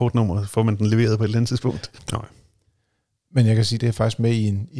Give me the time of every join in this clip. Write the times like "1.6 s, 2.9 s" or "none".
2.0 s, 3.8 s